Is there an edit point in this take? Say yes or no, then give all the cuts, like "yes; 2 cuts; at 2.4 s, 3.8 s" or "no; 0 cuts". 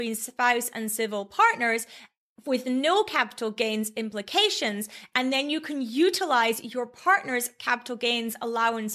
no; 0 cuts